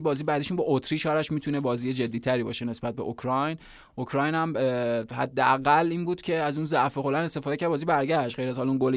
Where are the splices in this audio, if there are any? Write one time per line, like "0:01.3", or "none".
none